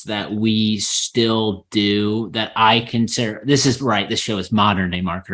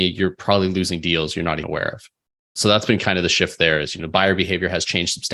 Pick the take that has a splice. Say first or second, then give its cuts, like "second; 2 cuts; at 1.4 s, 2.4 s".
second; 1 cut; at 1.6 s